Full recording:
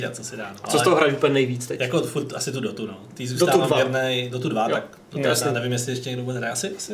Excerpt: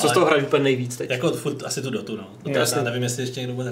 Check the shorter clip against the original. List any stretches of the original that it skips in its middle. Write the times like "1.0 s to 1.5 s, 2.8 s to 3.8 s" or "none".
3.1 s to 5.1 s